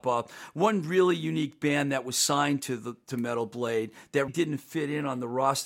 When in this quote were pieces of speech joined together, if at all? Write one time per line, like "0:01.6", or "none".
0:04.3